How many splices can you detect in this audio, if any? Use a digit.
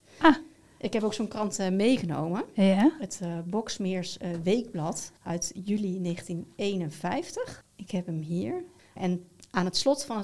3